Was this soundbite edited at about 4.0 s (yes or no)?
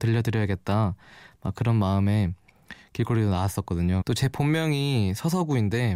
yes